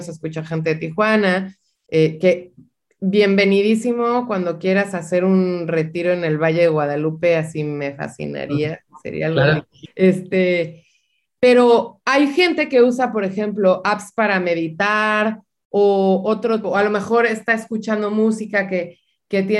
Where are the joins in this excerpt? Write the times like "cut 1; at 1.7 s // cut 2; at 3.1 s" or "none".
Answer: cut 1; at 9.8 s // cut 2; at 16.6 s